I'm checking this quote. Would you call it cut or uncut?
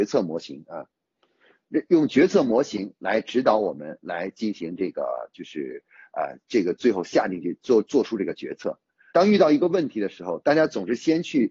cut